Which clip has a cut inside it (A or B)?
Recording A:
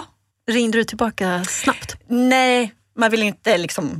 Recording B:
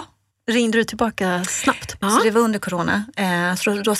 B